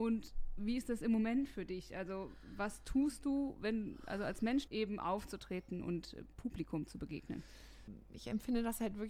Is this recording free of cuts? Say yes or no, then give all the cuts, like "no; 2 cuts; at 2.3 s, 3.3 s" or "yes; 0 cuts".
no; 1 cut; at 4.7 s